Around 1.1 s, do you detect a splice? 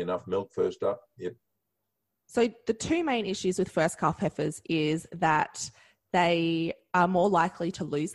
no; 0 cuts

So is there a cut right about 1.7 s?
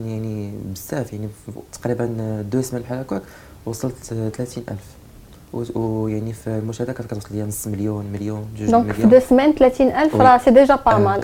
yes; 1 cut; at 1.7 s

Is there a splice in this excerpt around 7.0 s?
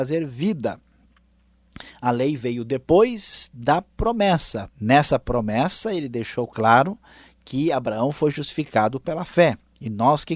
no; 1 cut; at 4.7 s

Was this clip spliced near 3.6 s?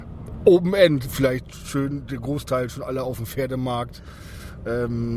no; 1 cut; at 1.0 s

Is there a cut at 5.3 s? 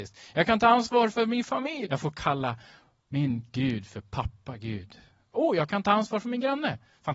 yes; 2 cuts; at 1.8 s, 5.3 s

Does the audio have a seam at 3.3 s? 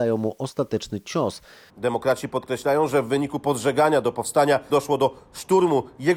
no; 2 cuts; at 1.7 s, 4.7 s

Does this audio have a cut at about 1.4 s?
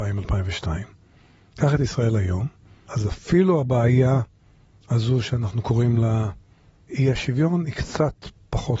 no; 0 cuts

